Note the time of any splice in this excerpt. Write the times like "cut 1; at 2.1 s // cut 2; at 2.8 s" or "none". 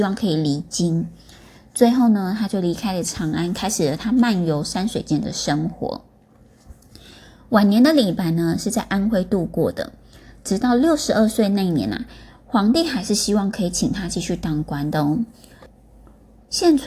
none